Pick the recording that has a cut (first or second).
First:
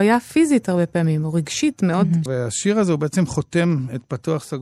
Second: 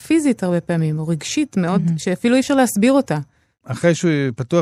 first